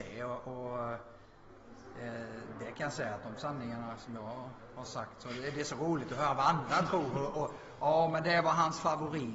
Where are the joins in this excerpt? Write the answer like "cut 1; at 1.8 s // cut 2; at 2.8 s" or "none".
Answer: none